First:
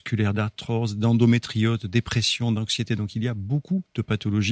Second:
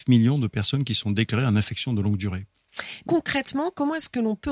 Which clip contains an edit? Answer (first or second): second